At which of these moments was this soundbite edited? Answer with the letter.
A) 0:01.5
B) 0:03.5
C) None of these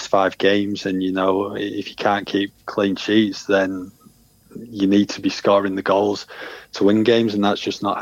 C